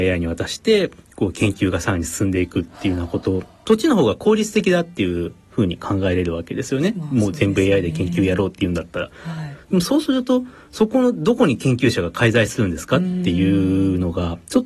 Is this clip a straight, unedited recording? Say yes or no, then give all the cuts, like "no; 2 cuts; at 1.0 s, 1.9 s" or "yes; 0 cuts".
yes; 0 cuts